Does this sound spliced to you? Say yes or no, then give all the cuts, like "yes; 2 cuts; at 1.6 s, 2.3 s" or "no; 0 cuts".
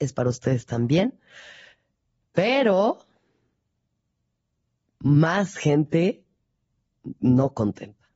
no; 0 cuts